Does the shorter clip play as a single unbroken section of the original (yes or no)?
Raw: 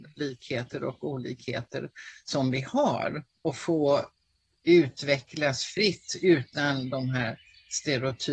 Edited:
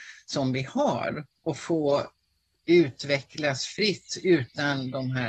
yes